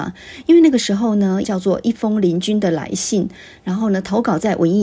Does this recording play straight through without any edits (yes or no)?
no